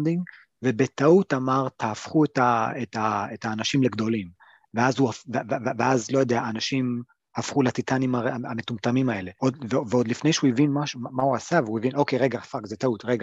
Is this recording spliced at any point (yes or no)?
no